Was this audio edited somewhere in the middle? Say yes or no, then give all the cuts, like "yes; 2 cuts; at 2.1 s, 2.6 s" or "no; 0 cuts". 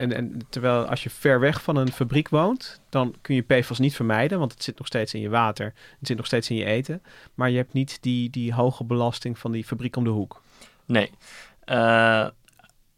no; 0 cuts